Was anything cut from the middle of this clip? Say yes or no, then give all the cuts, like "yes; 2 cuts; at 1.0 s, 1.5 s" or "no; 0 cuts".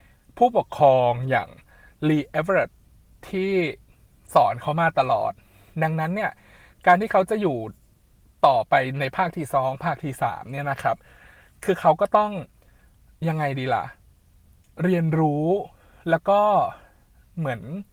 no; 0 cuts